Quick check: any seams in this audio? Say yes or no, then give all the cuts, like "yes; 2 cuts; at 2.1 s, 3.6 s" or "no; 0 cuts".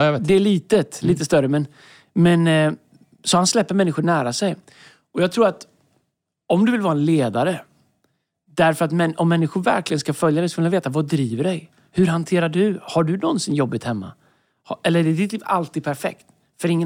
no; 0 cuts